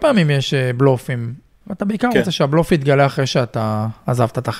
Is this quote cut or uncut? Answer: cut